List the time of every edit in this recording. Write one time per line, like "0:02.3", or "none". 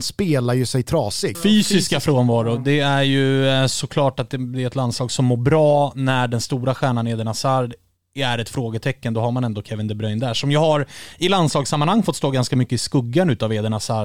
0:01.3